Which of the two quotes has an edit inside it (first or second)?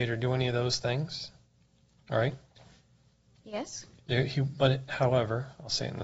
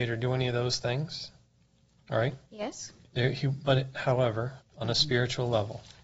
second